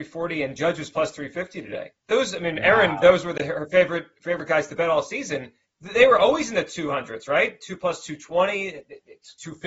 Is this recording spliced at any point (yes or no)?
yes